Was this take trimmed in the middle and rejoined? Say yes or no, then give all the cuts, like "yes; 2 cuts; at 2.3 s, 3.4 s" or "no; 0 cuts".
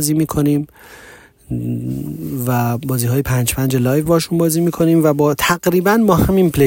no; 0 cuts